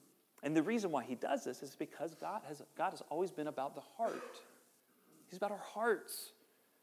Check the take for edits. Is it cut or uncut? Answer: uncut